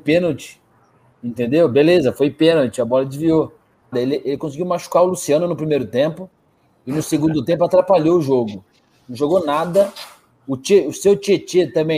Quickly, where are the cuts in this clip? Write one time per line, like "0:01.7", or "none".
0:03.9